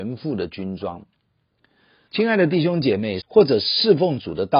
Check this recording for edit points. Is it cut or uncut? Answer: cut